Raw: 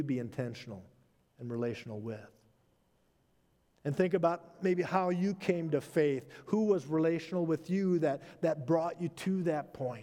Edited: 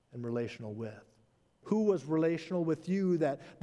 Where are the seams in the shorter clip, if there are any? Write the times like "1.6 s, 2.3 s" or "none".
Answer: 1.6 s